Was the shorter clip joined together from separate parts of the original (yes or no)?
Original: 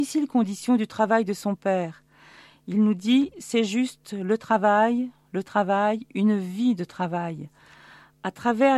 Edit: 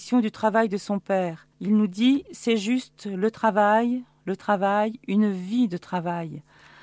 yes